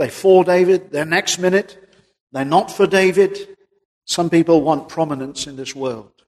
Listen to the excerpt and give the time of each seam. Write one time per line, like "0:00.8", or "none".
0:04.0